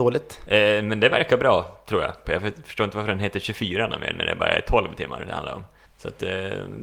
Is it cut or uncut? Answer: cut